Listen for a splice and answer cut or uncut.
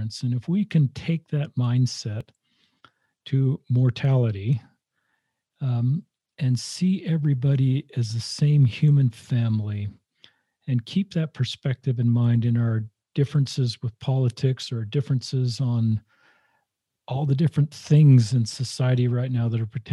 uncut